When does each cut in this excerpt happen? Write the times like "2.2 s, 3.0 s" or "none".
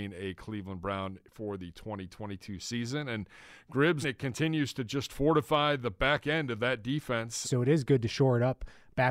4.0 s, 7.4 s